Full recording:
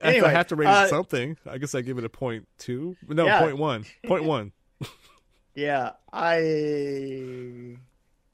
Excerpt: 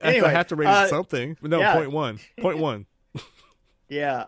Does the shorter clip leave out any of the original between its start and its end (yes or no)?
yes